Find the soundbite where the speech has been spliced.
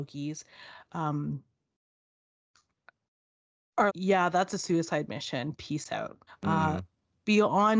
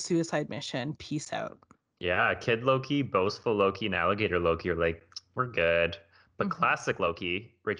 first; 2 cuts; at 3.9 s, 6.3 s

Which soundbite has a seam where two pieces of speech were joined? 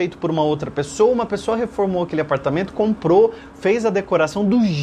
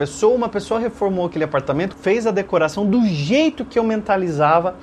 second; 1 cut; at 1.9 s

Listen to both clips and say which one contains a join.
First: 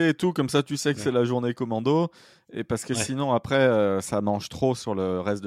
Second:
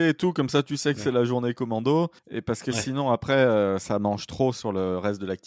second; 1 cut; at 2.2 s

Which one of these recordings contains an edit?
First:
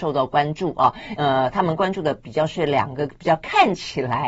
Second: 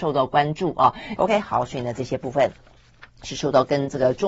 second; 1 cut; at 1.2 s

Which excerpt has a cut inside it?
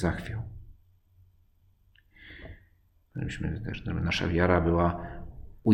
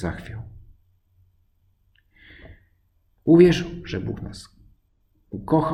first; 1 cut; at 3.0 s

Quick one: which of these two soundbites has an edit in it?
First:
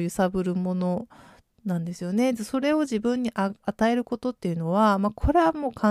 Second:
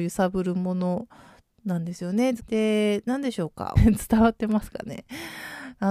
second; 2 cuts; at 2.4 s, 3.8 s

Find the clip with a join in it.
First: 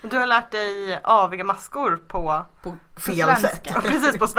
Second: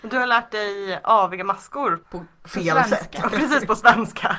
second; 1 cut; at 2.0 s

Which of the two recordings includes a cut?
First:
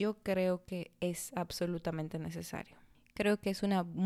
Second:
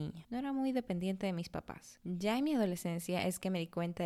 second; 1 cut; at 2.0 s

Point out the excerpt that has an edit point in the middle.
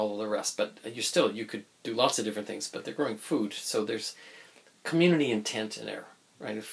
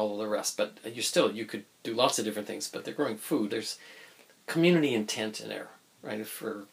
second; 1 cut; at 3.5 s

